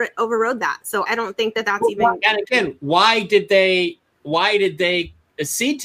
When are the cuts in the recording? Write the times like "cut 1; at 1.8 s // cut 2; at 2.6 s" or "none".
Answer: cut 1; at 1.1 s